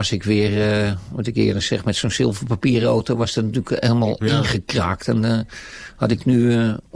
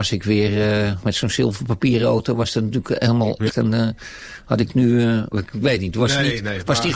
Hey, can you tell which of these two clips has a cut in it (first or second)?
second